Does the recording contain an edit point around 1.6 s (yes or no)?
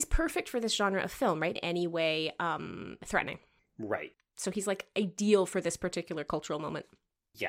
yes